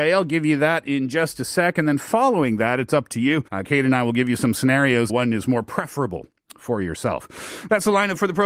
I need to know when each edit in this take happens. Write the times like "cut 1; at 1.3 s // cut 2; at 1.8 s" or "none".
cut 1; at 3.5 s // cut 2; at 5.1 s